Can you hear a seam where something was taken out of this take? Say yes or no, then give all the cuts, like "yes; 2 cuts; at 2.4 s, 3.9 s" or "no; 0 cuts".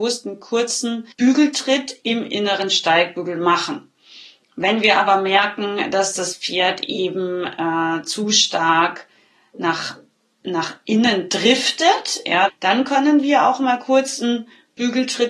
yes; 2 cuts; at 1.1 s, 12.5 s